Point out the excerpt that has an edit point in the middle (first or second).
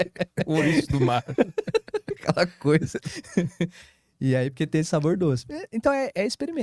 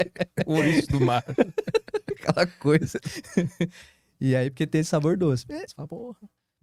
second